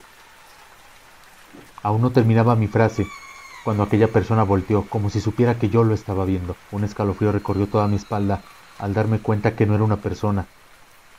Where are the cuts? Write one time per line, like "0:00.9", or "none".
0:06.6